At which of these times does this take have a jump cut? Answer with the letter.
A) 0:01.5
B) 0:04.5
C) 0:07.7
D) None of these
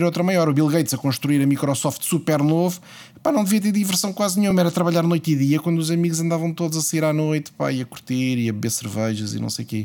D